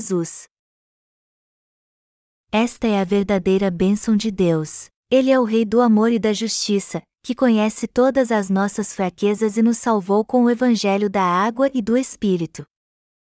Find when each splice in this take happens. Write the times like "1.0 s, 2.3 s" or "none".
5.0 s